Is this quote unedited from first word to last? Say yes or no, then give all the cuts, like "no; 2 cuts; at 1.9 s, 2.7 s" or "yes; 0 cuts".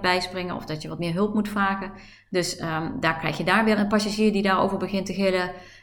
no; 2 cuts; at 2.2 s, 3.8 s